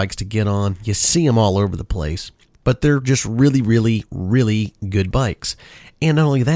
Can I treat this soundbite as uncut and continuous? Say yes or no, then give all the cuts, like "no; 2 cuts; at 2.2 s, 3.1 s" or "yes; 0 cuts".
yes; 0 cuts